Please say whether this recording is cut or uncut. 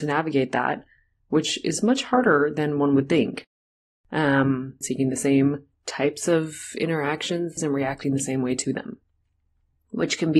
cut